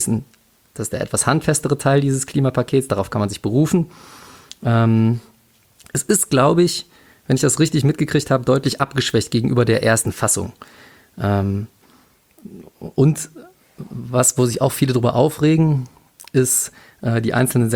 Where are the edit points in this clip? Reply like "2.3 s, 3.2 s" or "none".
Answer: none